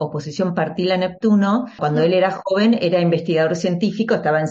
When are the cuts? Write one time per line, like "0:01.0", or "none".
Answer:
0:01.8